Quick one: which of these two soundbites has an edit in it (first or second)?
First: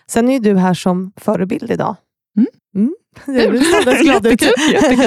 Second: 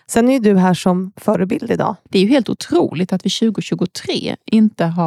second